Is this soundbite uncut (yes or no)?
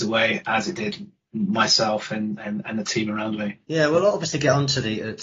no